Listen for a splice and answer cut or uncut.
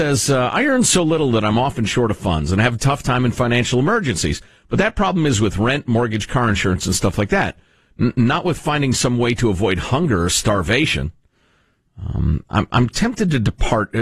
uncut